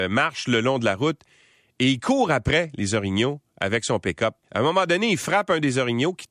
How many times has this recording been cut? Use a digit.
1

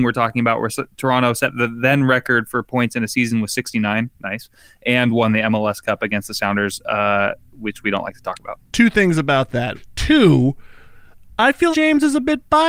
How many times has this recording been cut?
2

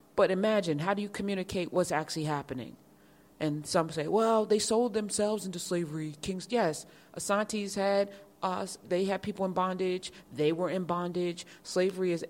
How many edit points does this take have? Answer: 1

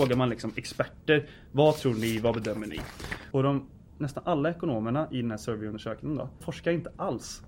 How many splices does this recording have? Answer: 2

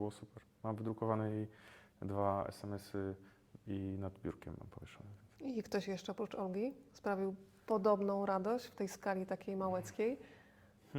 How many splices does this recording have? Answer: 1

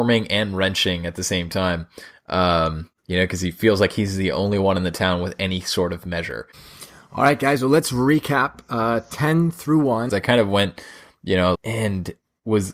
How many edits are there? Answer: 2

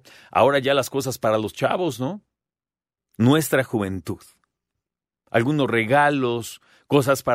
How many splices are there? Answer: 2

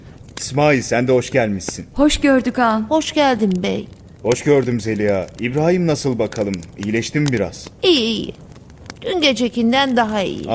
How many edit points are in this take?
0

